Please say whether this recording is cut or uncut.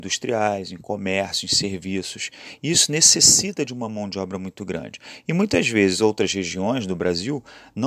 uncut